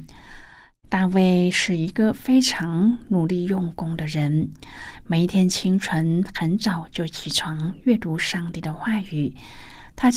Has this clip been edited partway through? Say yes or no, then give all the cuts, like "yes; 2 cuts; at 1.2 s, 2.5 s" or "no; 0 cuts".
no; 0 cuts